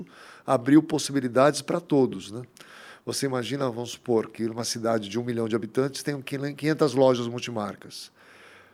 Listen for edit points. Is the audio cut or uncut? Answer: uncut